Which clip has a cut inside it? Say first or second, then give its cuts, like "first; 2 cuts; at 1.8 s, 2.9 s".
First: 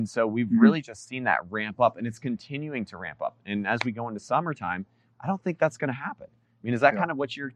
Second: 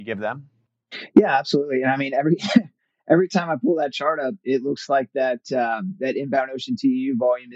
first; 1 cut; at 5.1 s